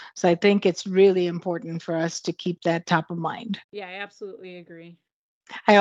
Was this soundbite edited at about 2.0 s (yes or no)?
no